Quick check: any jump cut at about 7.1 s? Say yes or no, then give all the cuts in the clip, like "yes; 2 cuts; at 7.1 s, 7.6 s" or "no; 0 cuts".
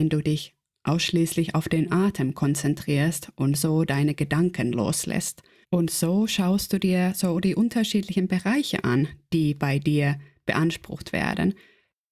no; 1 cut; at 5.6 s